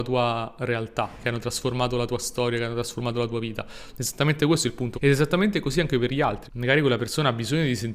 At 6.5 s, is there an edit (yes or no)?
yes